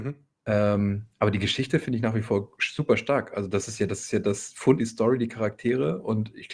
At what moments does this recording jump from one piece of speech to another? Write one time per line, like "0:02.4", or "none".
0:04.8